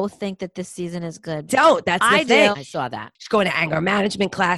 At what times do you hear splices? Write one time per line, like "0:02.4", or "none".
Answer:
0:01.5
0:02.5